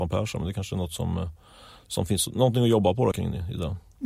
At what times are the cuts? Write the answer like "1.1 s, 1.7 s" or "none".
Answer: 3.1 s

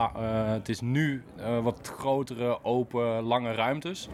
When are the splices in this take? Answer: none

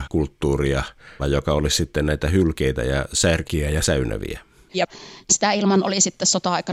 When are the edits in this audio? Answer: 1.2 s, 4.7 s

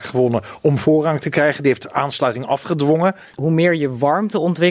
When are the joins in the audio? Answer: 3.3 s

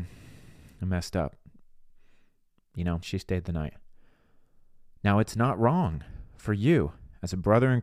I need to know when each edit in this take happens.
3.0 s

